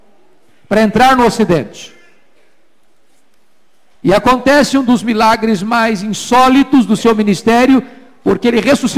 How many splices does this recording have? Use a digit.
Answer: 1